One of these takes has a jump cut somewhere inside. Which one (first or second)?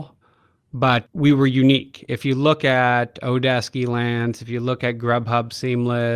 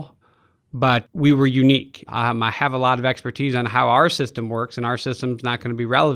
second